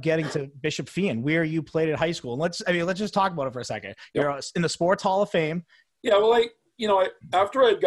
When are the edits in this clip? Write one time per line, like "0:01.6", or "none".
0:05.9